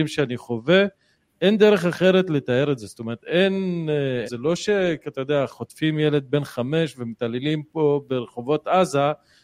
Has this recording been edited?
yes; 1 cut; at 4.3 s

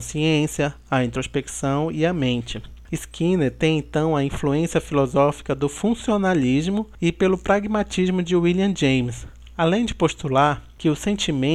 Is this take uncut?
no; 1 cut; at 2.9 s

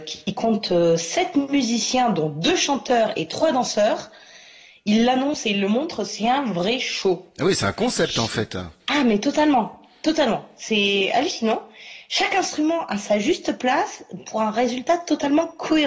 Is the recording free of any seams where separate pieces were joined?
yes; 0 cuts

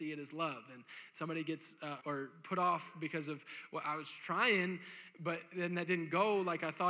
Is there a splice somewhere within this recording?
yes; 1 cut; at 2.0 s

